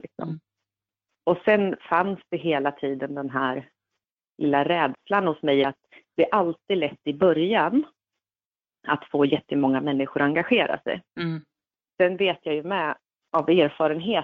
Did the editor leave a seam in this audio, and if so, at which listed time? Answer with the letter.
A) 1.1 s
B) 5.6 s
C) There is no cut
B